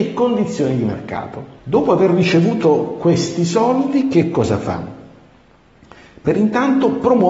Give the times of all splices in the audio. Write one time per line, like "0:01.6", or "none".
0:01.6